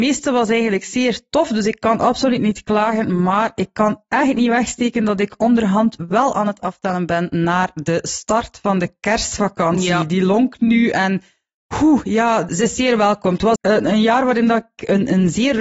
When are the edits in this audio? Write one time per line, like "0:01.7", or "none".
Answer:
0:12.5
0:13.6